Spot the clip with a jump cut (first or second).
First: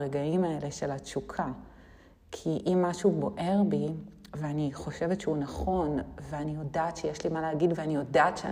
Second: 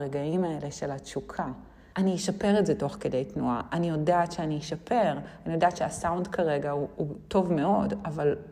second